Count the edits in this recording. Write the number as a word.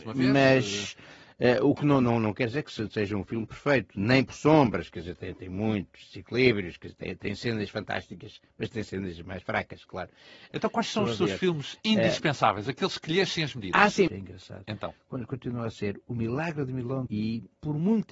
two